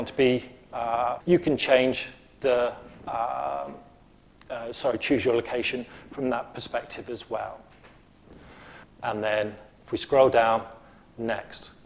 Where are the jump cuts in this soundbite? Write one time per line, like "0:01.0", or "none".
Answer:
0:01.2
0:08.8